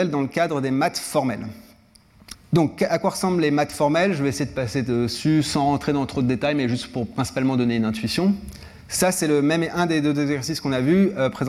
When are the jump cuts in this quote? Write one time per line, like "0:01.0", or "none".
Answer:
0:02.3